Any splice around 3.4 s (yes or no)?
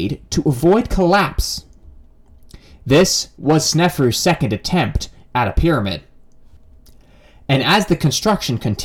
yes